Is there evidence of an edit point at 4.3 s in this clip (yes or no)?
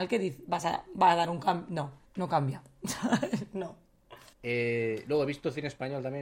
yes